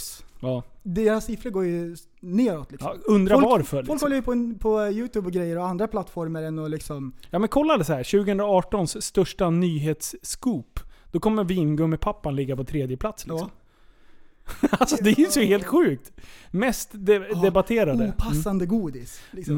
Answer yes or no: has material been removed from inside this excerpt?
no